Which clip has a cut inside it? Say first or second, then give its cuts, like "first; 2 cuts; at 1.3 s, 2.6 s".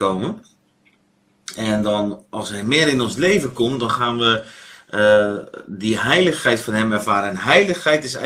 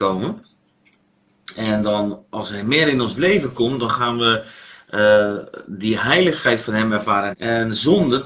second; 1 cut; at 7.3 s